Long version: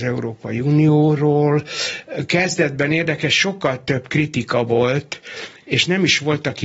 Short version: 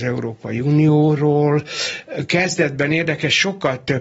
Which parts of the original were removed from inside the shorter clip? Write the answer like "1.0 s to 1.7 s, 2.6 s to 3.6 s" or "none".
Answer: none